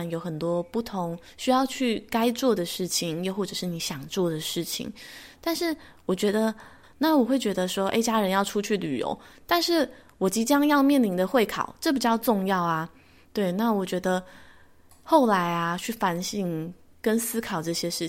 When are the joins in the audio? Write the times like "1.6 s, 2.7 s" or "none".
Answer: 6.8 s